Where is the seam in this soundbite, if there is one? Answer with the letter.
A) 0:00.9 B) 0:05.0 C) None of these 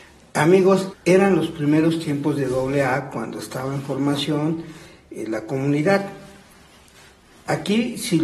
A